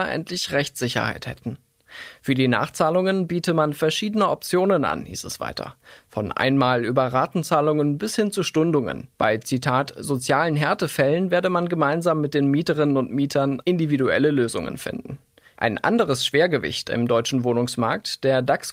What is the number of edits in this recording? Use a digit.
2